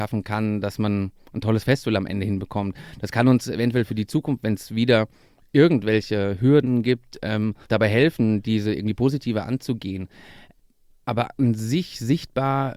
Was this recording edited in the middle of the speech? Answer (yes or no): yes